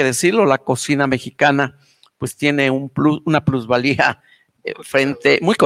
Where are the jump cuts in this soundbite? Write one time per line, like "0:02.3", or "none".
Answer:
none